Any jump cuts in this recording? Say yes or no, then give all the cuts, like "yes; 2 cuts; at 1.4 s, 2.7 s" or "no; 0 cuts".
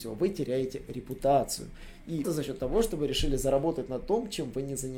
yes; 1 cut; at 2.2 s